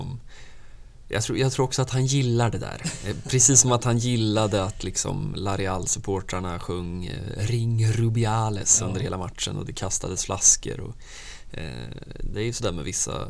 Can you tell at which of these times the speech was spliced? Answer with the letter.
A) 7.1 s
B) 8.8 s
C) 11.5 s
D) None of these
D